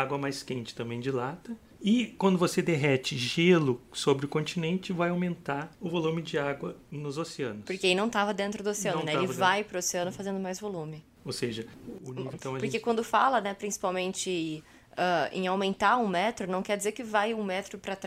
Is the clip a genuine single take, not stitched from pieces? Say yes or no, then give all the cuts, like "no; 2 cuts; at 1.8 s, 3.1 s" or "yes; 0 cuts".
no; 2 cuts; at 11.2 s, 12.3 s